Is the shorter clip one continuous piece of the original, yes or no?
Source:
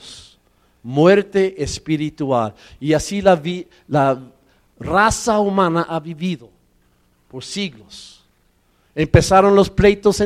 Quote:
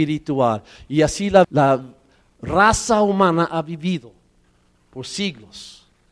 no